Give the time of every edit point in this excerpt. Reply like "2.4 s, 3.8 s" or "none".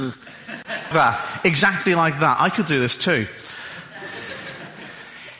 0.9 s